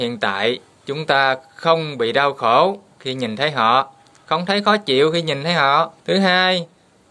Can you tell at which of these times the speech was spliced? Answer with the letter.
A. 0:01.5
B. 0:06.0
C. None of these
B